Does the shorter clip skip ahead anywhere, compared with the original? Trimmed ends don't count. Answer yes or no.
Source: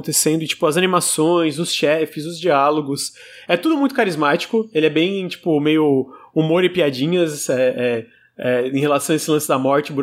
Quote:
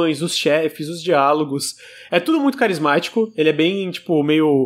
no